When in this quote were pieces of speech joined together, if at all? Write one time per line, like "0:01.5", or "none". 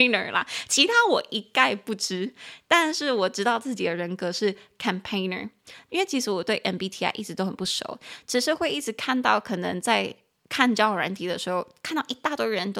none